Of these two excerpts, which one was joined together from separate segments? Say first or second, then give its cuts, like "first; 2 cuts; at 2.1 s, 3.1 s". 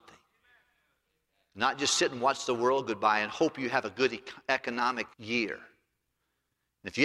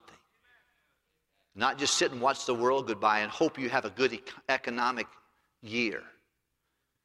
first; 1 cut; at 5.1 s